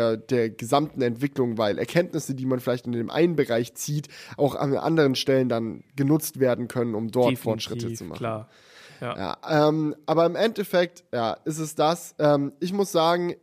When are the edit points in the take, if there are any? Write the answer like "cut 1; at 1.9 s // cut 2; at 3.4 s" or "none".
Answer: none